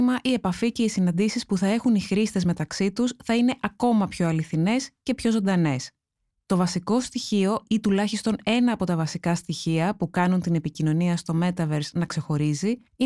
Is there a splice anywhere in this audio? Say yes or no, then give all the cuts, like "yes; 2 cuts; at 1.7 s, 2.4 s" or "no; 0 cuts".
no; 0 cuts